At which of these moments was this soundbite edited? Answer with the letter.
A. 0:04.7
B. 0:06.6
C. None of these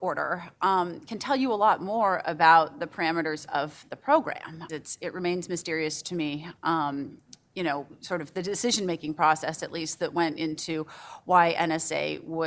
A